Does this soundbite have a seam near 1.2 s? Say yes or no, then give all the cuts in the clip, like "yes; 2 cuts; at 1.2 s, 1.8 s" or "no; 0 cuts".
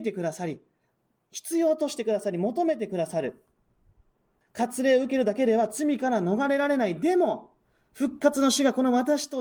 no; 1 cut; at 4.4 s